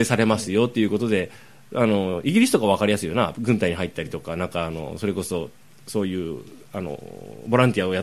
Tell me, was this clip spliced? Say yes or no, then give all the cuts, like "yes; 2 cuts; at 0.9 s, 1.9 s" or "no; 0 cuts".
no; 0 cuts